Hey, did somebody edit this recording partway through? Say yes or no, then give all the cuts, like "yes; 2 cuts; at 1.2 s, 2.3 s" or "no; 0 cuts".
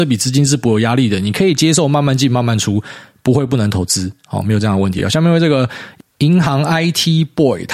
no; 0 cuts